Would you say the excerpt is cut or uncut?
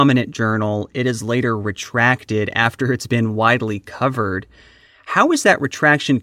uncut